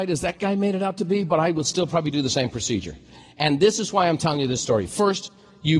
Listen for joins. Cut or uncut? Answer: uncut